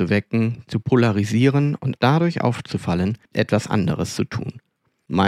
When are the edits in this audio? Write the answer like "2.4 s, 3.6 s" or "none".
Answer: 2.0 s, 3.3 s